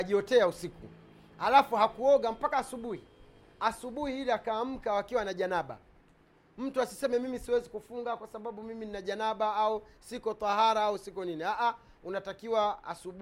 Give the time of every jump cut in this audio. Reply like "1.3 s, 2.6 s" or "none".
none

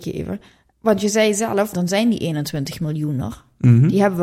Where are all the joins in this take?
1.7 s

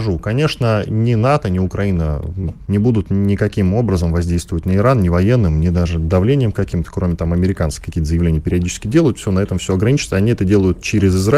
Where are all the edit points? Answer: 2.7 s

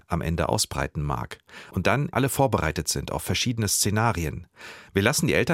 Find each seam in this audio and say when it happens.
2.1 s

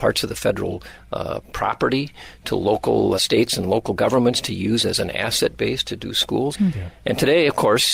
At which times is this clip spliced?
3.2 s, 6.5 s

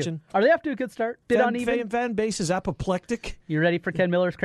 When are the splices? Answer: 1.2 s

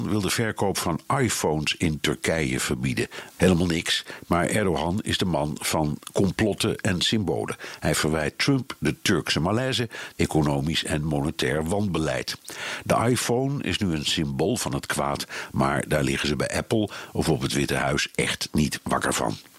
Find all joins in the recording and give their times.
3.3 s, 10.1 s

